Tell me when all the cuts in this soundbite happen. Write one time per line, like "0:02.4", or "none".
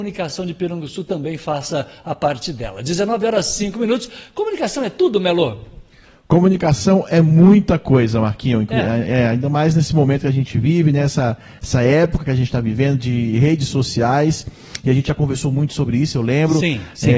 none